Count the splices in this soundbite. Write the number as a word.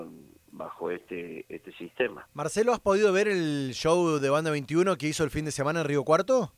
zero